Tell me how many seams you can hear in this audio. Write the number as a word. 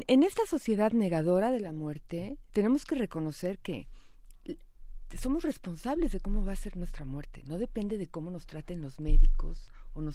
one